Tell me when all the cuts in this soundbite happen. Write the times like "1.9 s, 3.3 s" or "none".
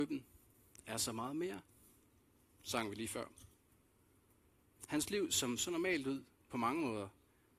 5.6 s

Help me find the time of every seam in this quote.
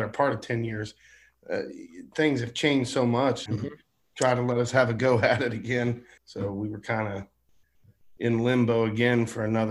3.5 s, 6.2 s

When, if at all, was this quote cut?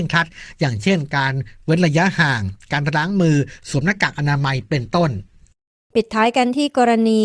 none

